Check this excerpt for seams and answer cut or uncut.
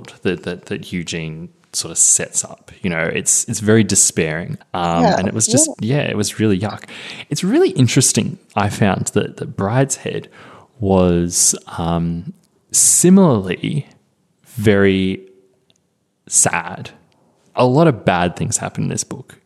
cut